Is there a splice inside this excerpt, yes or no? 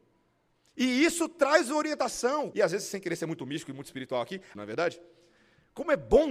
yes